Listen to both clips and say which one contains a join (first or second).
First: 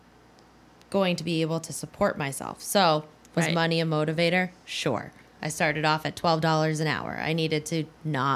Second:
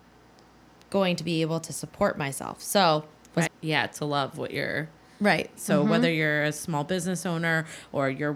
second